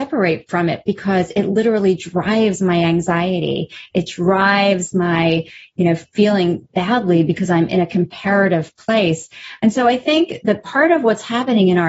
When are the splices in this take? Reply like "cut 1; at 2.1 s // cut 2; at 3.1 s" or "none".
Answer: cut 1; at 6.7 s